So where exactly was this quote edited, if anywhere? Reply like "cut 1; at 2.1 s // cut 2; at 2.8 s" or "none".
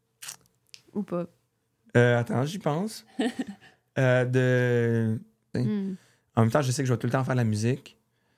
cut 1; at 5.5 s